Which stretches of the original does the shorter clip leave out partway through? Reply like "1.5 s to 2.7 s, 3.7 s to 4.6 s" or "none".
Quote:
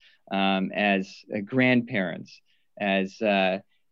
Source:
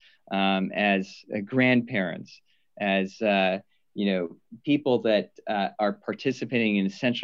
none